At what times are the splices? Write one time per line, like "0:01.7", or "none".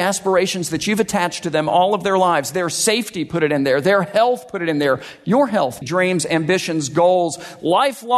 0:05.8